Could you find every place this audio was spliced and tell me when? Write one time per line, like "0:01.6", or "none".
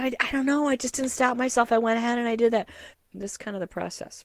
0:02.9